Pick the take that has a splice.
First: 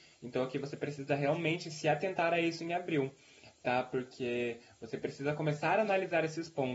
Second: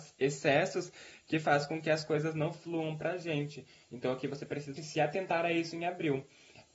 second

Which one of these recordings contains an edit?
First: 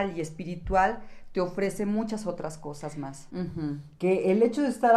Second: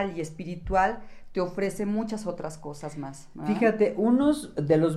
first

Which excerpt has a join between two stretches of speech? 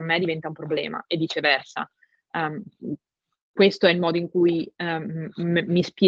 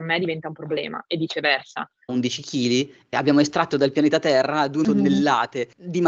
second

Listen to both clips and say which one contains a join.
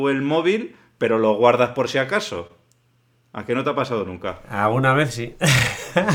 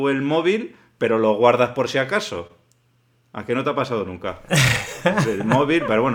second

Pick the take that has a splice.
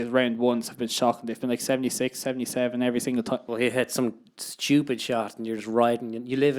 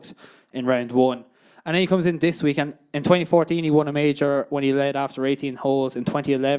first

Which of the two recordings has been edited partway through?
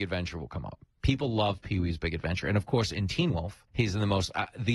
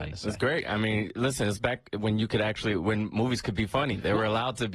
first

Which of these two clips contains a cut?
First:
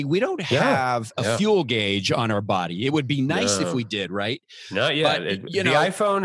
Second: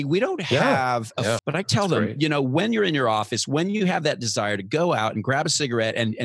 second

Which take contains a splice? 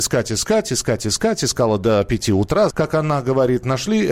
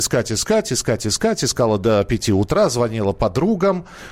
first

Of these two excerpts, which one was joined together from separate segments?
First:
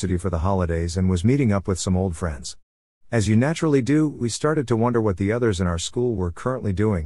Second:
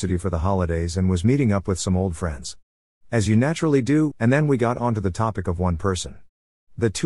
second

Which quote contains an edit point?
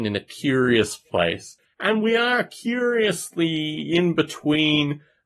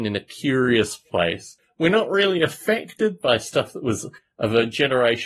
first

